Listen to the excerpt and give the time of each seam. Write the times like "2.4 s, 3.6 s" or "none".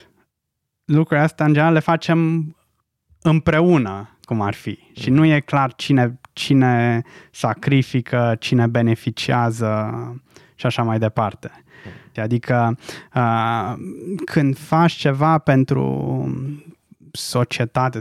12.2 s